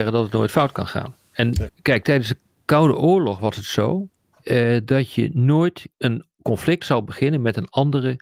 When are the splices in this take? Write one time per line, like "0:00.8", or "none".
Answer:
0:01.7
0:05.9